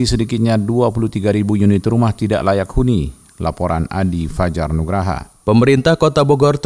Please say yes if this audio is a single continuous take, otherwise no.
yes